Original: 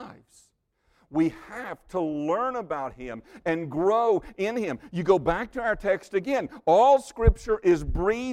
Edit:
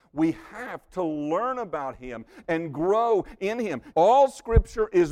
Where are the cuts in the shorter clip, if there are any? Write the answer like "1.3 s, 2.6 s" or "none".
3.9 s